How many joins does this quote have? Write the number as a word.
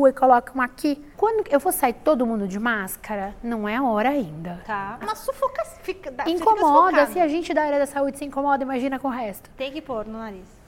two